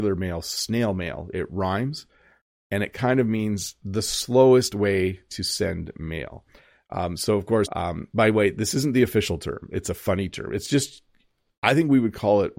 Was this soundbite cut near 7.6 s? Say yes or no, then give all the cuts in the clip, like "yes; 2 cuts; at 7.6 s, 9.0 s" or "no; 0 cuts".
yes; 1 cut; at 7.6 s